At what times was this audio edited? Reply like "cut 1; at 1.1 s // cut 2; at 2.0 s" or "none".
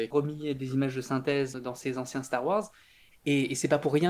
cut 1; at 3.1 s